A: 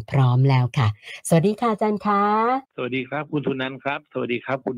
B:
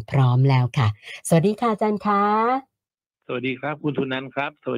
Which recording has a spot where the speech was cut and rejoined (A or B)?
A